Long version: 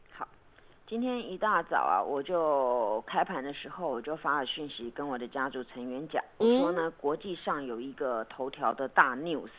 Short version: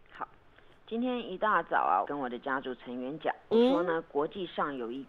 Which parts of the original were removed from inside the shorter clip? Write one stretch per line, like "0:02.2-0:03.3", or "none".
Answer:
0:02.0-0:04.9